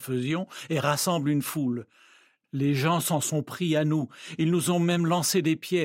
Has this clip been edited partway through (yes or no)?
no